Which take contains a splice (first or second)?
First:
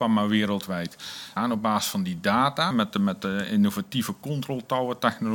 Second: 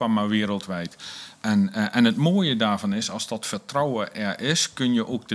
first